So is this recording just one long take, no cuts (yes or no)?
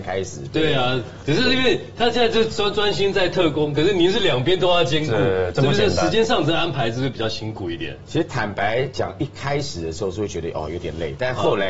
yes